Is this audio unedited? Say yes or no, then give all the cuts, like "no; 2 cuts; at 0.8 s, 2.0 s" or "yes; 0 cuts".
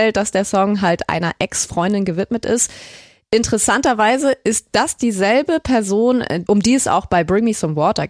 yes; 0 cuts